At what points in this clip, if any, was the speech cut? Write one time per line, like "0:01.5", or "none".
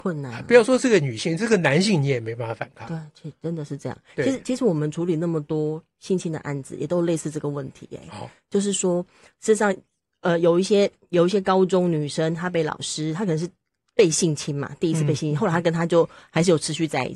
none